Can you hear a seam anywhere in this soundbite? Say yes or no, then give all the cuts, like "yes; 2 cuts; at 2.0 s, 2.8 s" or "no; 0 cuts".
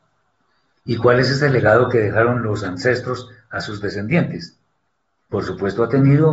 yes; 1 cut; at 5.3 s